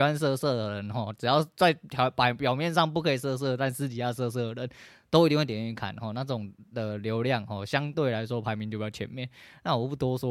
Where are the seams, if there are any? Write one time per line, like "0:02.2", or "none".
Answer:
none